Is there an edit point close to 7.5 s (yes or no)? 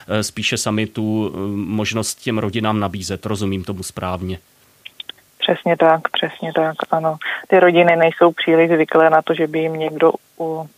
no